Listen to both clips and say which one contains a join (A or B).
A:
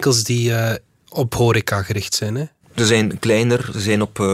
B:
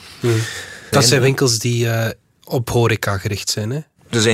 B